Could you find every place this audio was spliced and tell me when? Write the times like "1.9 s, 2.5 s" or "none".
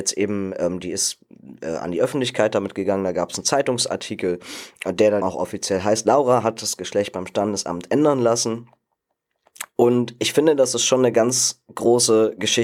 5.2 s